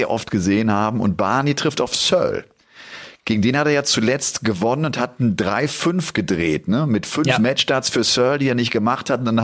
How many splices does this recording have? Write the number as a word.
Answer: zero